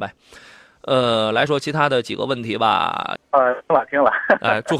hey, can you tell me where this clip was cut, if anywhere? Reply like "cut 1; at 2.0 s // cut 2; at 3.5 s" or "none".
cut 1; at 1.5 s // cut 2; at 3.2 s